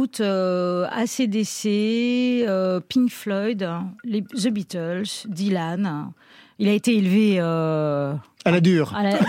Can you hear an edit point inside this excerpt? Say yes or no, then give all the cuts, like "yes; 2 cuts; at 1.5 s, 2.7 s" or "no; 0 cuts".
no; 0 cuts